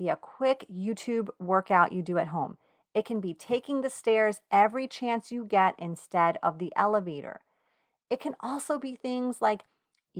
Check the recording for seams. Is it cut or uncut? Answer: uncut